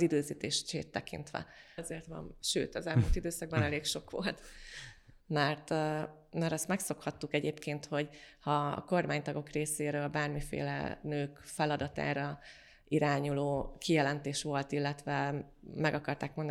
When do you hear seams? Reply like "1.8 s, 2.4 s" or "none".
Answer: 1.8 s, 5.2 s